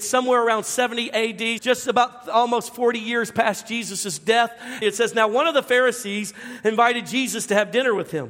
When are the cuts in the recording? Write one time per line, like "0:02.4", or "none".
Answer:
0:01.6
0:04.8